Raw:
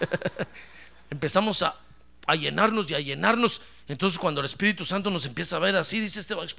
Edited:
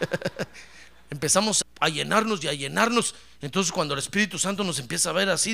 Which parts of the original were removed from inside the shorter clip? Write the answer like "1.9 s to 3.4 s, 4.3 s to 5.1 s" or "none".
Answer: 1.6 s to 2.1 s